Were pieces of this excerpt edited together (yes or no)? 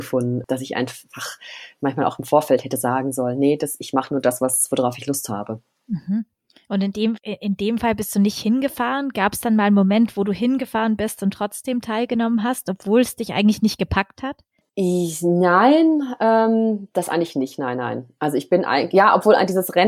no